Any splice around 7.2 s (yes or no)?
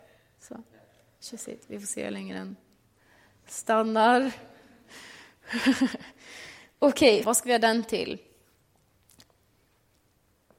yes